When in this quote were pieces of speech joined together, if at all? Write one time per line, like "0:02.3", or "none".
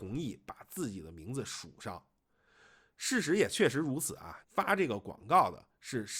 0:04.4